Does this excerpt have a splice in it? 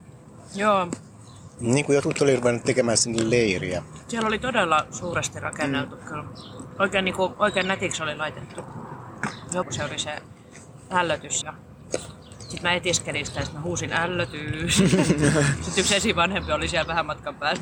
yes; 2 cuts; at 9.6 s, 11.4 s

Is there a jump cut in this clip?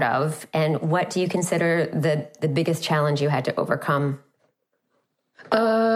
no; 0 cuts

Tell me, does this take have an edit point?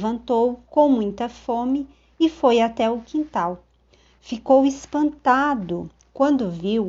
no; 0 cuts

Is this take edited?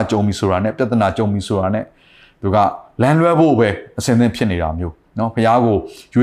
no; 0 cuts

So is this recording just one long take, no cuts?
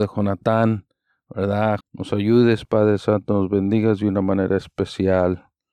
no; 1 cut; at 1.8 s

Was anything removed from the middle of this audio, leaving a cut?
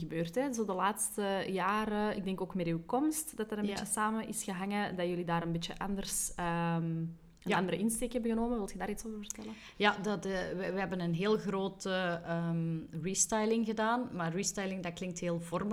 no; 0 cuts

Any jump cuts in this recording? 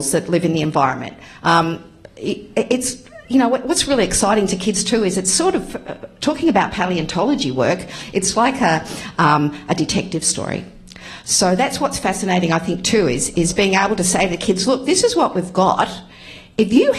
no; 0 cuts

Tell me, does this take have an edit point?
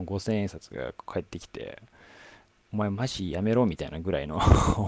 yes; 1 cut; at 2.6 s

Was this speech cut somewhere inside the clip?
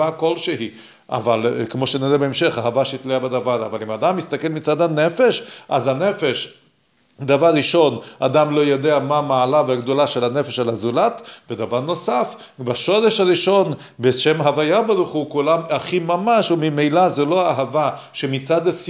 no; 0 cuts

